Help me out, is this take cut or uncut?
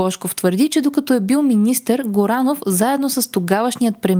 uncut